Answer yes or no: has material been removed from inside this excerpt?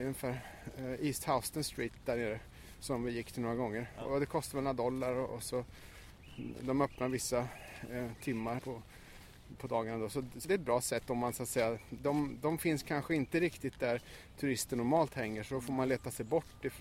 yes